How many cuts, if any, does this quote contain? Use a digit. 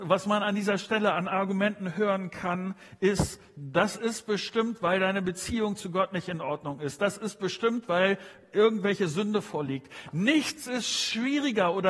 0